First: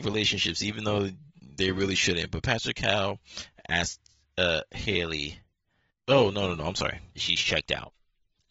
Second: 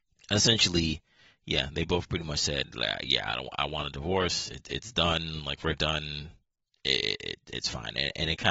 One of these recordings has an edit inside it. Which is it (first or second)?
first